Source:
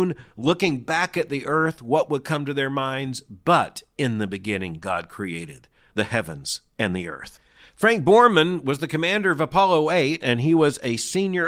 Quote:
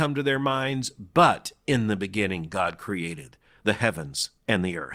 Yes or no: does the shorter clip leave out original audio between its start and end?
no